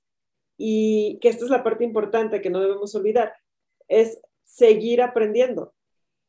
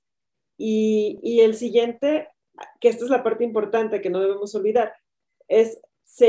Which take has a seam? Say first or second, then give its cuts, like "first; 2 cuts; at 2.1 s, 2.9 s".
first; 1 cut; at 1.2 s